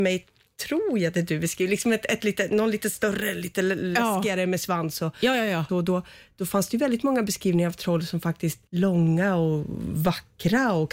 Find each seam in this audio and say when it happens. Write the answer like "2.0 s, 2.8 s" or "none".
5.7 s, 8.7 s